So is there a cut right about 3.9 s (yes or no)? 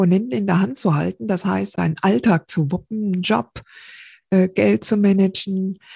no